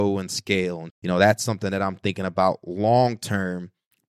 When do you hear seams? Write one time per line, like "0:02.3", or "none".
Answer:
0:00.9